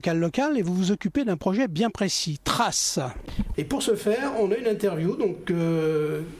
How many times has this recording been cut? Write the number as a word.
one